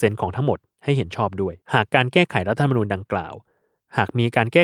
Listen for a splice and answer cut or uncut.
cut